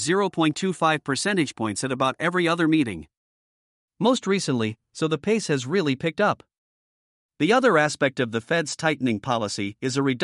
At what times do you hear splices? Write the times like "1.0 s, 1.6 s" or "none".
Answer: 4.9 s